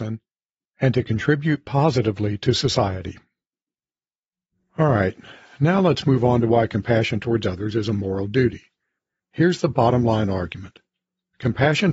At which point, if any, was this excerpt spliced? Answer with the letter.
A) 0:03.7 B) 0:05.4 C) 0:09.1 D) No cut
D